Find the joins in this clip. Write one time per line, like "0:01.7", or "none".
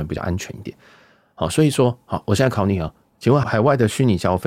0:03.4